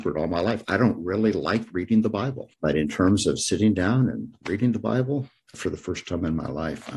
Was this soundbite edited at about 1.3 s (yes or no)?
no